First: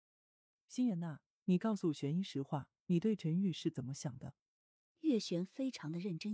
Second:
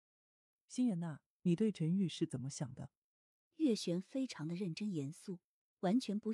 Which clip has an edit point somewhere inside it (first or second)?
second